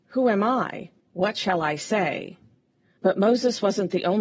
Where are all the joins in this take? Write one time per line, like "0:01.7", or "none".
0:01.0
0:03.0

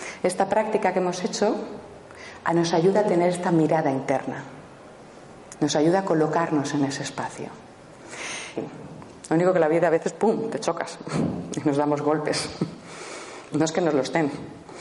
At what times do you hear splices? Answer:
0:08.6
0:13.5

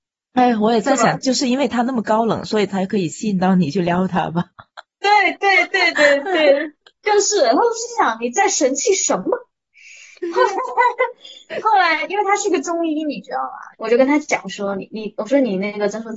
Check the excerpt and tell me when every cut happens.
0:05.9

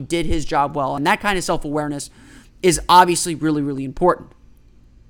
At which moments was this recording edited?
0:01.0

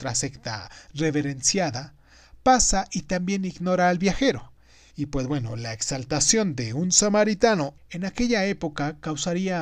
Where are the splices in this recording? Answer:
0:04.9
0:07.8

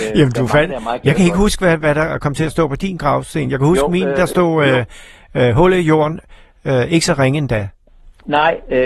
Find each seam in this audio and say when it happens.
none

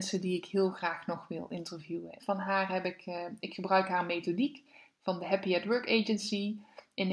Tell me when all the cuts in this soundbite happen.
0:02.2

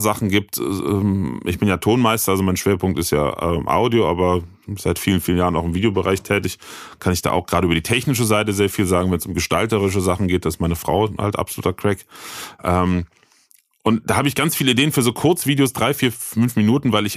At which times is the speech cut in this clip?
none

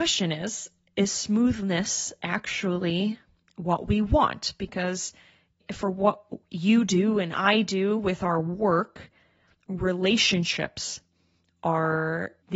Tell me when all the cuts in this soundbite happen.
none

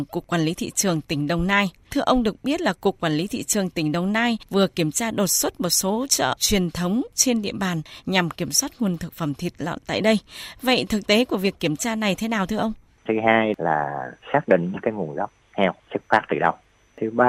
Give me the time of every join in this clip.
0:13.0

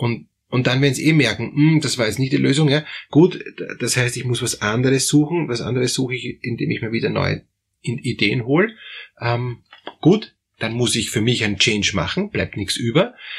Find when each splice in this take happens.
0:03.1

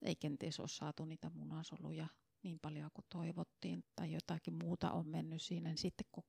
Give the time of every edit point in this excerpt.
0:03.8

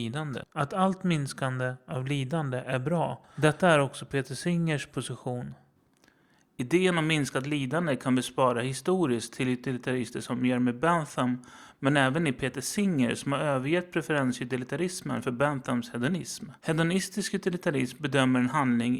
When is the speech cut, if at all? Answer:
0:16.6

